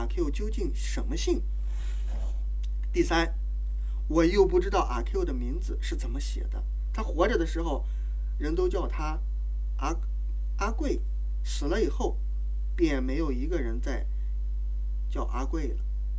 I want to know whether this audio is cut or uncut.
uncut